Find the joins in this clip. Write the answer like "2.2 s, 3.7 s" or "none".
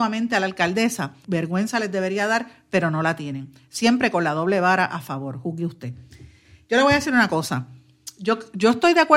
1.2 s

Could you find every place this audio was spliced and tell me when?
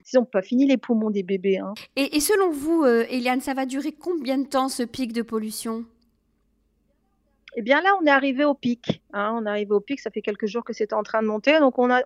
none

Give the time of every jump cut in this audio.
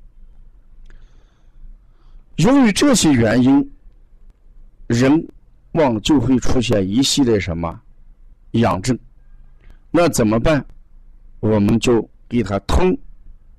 5.7 s

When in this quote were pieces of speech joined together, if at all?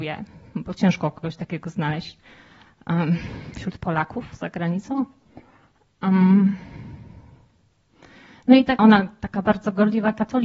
8.8 s

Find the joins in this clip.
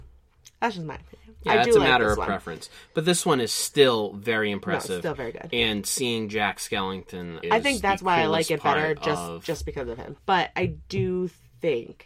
7.4 s, 10.2 s

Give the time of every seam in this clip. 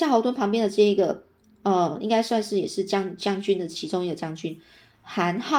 none

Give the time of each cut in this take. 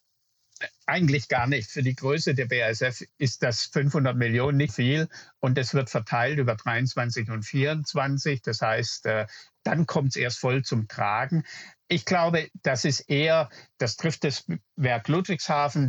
4.7 s

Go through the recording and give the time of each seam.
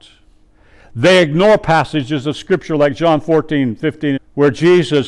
4.2 s

